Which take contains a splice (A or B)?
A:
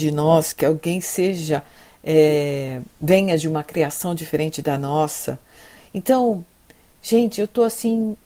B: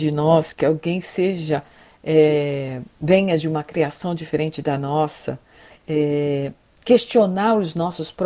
B